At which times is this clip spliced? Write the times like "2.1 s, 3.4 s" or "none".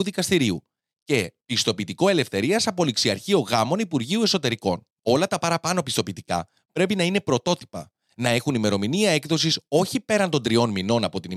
5.0 s